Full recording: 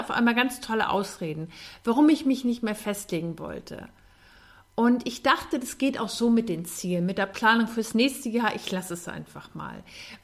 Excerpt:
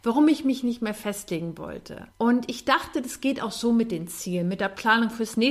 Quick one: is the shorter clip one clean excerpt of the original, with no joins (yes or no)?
no